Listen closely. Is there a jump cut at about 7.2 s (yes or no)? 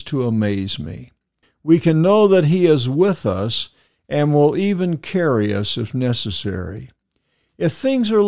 no